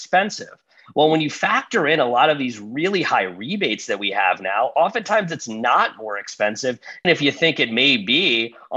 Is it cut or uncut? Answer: cut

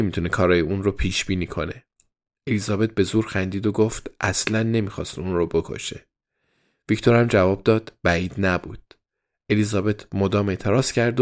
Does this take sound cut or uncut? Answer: uncut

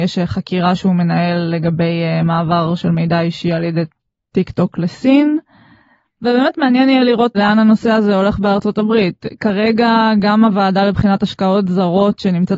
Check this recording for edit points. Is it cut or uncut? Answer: cut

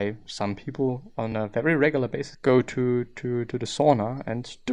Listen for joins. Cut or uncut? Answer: cut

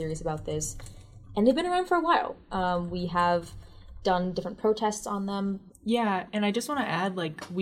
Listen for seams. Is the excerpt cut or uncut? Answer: cut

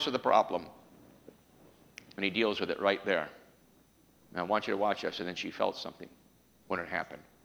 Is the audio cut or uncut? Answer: cut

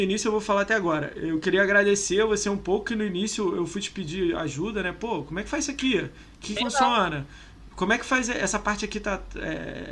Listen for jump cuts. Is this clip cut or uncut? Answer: cut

